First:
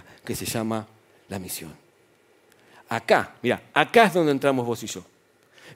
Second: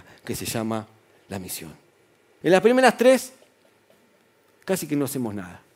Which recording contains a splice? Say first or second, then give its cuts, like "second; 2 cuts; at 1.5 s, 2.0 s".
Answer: second; 1 cut; at 2.4 s